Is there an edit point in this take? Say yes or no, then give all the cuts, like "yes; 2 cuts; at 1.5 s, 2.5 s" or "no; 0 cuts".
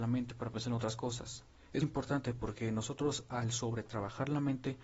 yes; 1 cut; at 1.8 s